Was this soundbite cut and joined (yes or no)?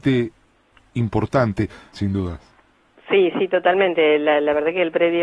yes